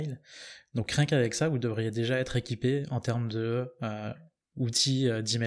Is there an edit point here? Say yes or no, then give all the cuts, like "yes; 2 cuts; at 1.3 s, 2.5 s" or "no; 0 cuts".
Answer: no; 0 cuts